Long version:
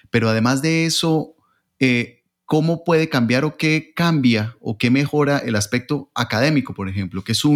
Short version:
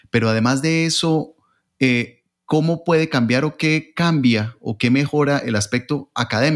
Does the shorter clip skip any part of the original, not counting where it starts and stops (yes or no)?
no